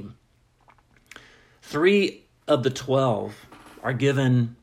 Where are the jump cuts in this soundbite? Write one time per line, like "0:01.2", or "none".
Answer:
none